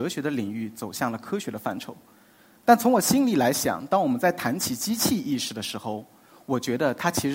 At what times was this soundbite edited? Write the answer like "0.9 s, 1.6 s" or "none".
none